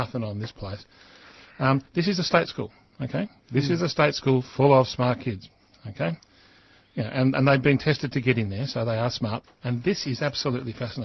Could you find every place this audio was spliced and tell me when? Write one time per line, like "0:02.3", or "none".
0:09.4